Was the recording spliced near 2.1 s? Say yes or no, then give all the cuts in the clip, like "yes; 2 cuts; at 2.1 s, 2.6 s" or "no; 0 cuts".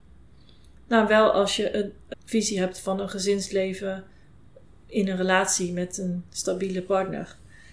yes; 1 cut; at 2.1 s